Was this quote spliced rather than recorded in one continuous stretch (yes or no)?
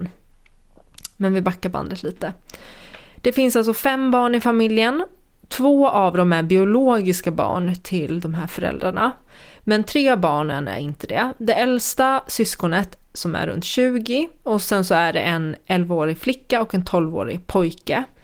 no